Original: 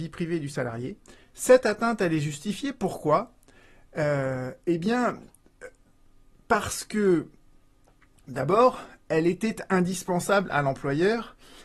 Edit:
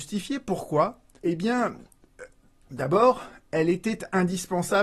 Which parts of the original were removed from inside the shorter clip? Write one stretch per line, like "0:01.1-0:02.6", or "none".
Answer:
0:03.5-0:04.6
0:06.0-0:08.2

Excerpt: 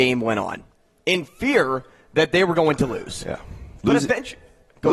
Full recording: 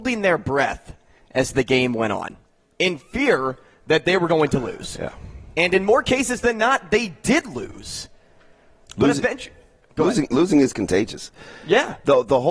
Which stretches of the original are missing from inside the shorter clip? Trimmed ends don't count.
0:05.5-0:08.9

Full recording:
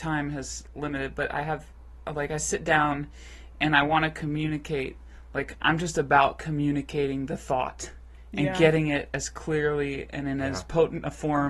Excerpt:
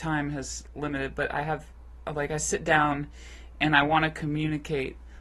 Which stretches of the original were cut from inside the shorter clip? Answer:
none

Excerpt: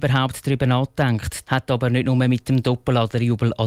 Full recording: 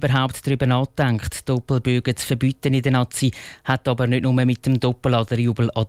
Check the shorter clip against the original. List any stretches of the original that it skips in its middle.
0:01.4-0:03.6

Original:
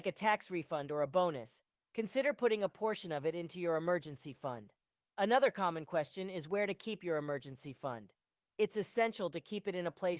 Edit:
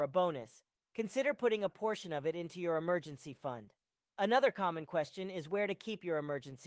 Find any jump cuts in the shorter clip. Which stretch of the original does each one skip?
none

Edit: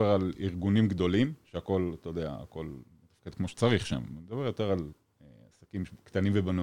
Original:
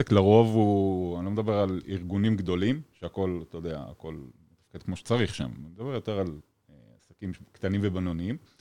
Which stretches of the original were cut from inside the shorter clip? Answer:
none

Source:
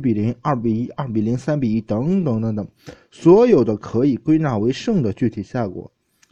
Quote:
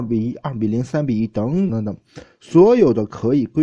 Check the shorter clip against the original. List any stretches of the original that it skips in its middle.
0:02.2-0:02.4

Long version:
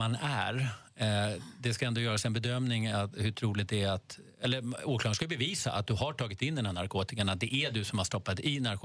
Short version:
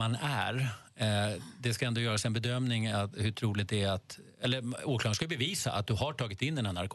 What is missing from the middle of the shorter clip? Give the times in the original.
none

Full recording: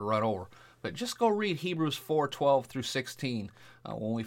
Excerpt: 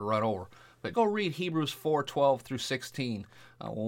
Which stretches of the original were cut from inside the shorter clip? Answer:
0:00.9-0:01.2

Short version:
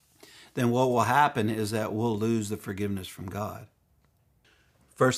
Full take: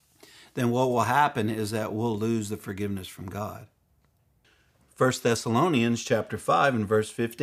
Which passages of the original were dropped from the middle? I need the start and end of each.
none

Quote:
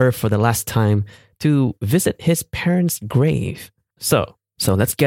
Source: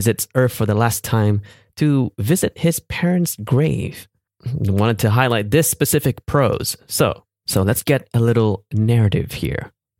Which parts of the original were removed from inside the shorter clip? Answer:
0:04.3-0:06.8

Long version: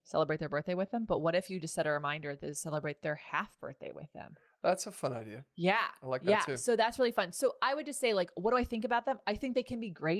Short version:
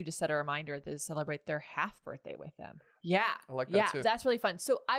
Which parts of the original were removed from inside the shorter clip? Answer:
0:04.6-0:05.5
0:06.6-0:06.8

